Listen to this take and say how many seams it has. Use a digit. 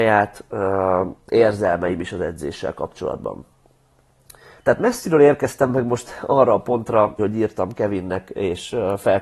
2